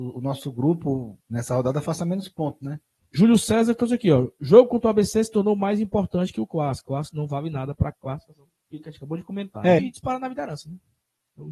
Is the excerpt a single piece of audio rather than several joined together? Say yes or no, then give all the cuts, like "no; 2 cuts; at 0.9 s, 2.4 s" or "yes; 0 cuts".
no; 2 cuts; at 3.0 s, 9.8 s